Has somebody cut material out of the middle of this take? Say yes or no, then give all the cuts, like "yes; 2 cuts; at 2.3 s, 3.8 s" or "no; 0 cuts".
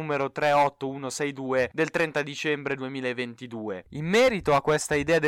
yes; 1 cut; at 3.8 s